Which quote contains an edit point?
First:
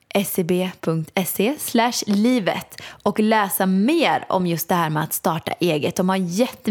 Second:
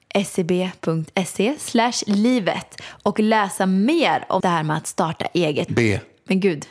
second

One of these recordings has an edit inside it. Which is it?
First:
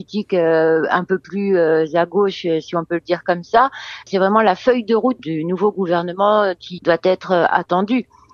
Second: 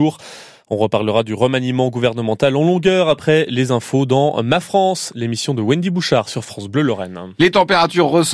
first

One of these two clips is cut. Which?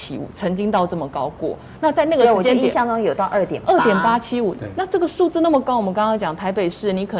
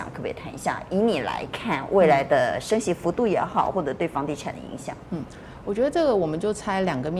second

